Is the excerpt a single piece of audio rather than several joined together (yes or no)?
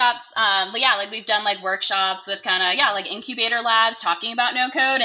yes